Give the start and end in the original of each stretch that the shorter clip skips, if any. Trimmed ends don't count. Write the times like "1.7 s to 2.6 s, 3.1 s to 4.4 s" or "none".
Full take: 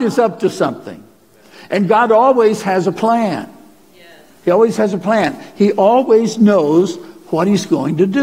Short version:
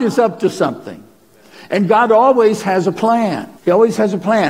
3.6 s to 4.4 s